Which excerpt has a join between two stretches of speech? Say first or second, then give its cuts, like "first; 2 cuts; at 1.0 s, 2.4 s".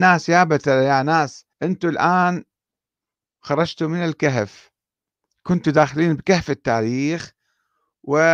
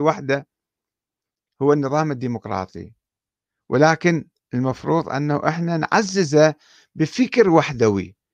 first; 1 cut; at 1.5 s